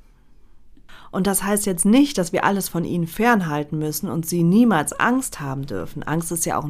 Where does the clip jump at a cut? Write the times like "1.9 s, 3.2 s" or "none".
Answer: none